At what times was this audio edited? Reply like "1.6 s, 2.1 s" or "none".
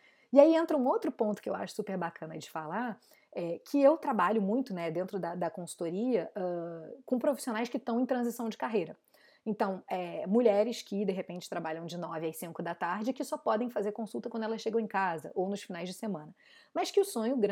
none